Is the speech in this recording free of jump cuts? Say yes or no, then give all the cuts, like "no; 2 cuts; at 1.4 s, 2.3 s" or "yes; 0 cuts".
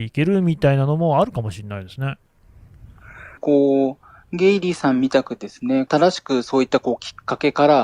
no; 2 cuts; at 3.4 s, 5.9 s